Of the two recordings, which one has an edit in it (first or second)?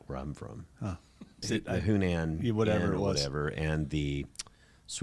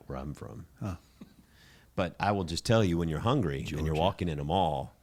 first